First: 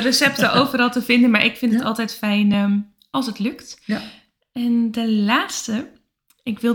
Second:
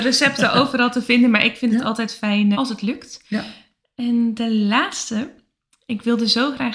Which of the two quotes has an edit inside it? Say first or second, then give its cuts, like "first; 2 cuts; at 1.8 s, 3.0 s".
second; 1 cut; at 2.5 s